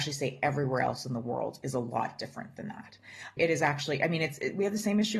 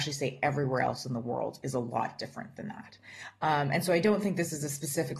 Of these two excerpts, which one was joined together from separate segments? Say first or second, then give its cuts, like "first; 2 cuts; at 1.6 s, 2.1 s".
first; 1 cut; at 3.4 s